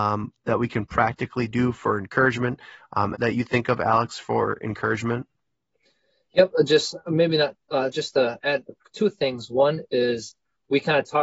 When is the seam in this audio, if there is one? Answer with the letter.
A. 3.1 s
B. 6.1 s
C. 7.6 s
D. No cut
A